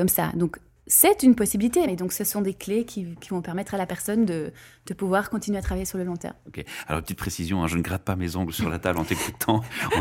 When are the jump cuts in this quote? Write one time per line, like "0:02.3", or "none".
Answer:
0:01.9